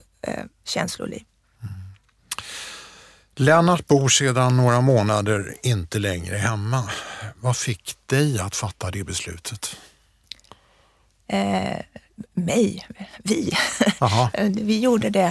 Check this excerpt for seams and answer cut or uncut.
uncut